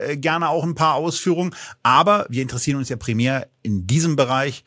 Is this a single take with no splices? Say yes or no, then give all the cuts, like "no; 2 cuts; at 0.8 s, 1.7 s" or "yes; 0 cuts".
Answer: yes; 0 cuts